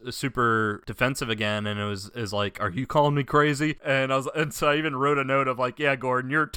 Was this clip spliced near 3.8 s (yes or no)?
yes